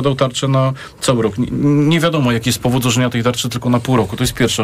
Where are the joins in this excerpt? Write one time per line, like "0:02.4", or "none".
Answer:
none